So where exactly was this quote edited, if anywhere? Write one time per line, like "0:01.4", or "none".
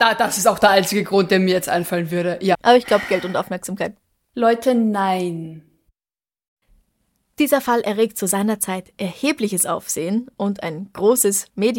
0:02.5